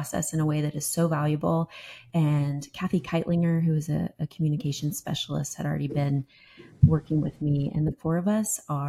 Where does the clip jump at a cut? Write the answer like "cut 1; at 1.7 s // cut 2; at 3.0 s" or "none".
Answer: none